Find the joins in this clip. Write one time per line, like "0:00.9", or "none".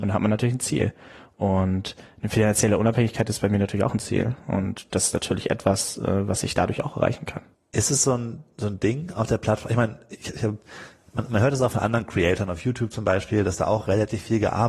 0:07.5